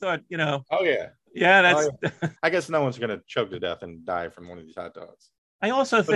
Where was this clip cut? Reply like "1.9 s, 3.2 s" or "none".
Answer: 2.4 s

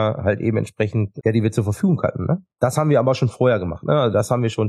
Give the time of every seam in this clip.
1.2 s

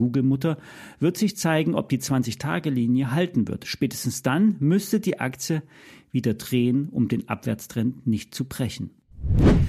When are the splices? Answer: none

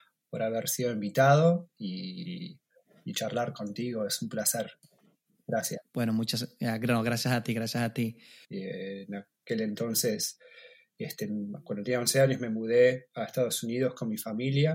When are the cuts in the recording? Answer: 8.4 s

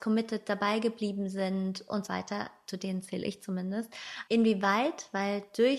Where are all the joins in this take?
2.1 s, 4.3 s

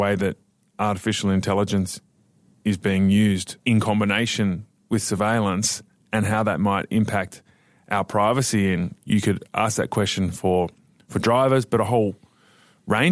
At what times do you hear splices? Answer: 3.6 s

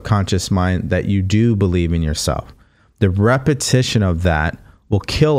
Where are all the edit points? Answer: none

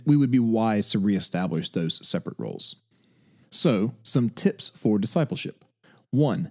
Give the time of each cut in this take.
3.4 s

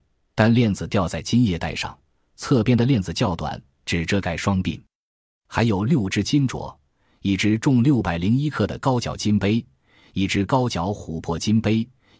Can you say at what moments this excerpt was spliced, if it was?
5.3 s

